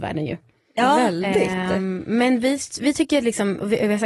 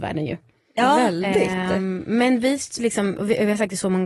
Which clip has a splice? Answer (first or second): second